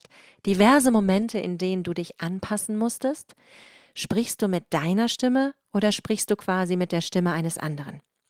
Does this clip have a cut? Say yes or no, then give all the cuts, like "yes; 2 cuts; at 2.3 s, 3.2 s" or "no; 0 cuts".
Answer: no; 0 cuts